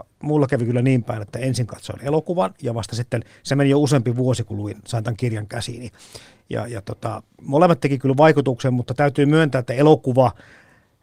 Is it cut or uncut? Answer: uncut